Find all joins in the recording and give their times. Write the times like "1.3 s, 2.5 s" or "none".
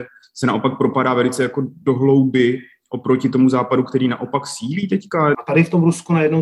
5.3 s